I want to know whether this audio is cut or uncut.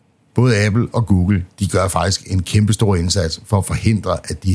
uncut